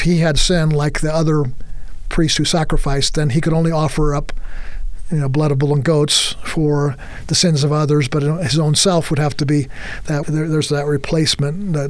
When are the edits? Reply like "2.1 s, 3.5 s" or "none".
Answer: 10.2 s